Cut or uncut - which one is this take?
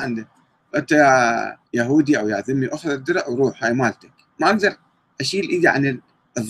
cut